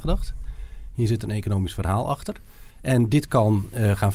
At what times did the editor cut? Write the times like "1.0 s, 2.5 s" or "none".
2.7 s